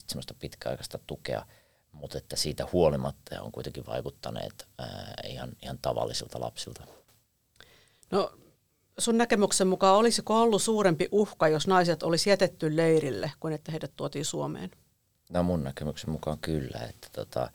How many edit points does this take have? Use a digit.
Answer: 0